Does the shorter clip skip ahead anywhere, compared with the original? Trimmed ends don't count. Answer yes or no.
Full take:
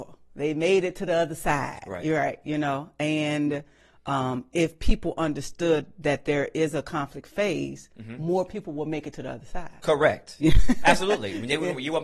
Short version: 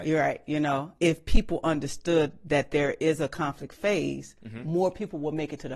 yes